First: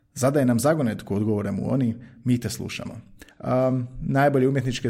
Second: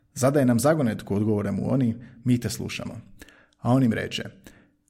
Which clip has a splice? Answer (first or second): first